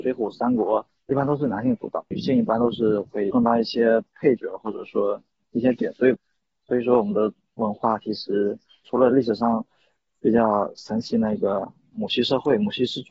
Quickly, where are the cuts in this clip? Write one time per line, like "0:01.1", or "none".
none